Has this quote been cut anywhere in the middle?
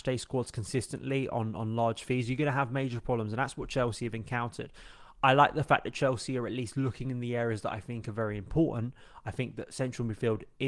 no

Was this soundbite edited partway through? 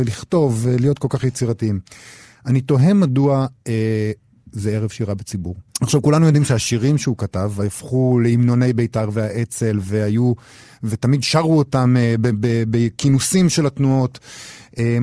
yes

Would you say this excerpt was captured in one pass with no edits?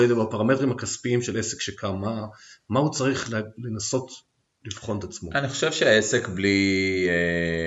yes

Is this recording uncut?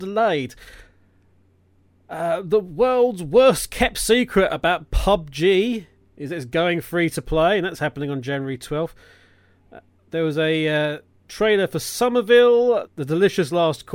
no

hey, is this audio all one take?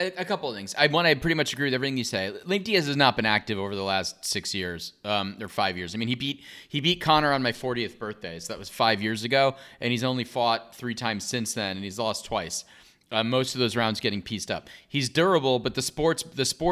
yes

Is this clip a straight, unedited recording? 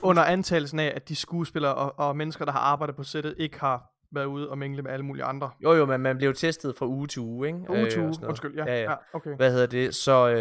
yes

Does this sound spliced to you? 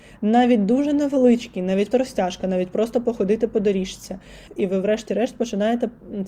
yes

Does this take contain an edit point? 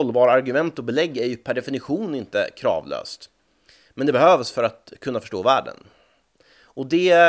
no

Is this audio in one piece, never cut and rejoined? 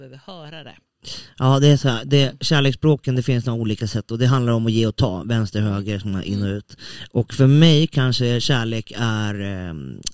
yes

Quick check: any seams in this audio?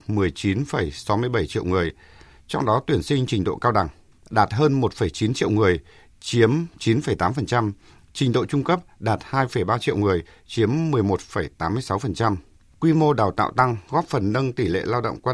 no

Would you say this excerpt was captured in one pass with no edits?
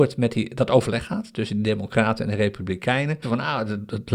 no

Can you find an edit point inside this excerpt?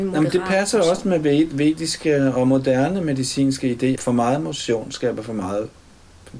yes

